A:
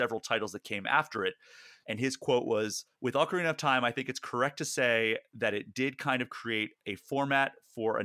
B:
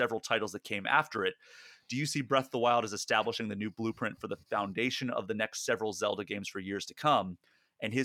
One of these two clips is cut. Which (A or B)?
A